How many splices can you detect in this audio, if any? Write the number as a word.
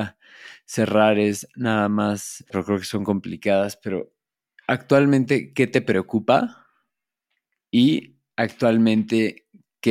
one